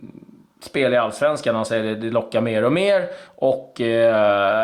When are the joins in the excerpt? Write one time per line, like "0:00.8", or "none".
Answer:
none